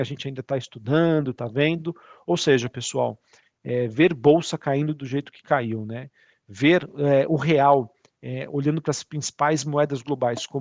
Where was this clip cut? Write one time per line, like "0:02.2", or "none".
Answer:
none